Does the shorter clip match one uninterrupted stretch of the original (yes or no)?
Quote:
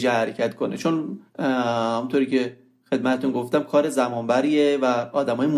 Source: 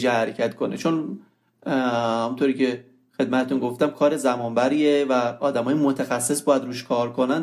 no